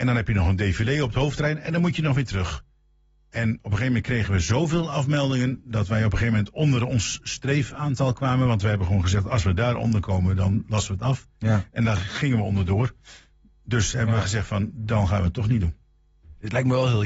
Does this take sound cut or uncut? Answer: uncut